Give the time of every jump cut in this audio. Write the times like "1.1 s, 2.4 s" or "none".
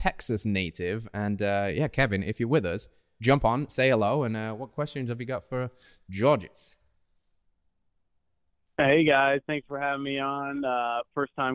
none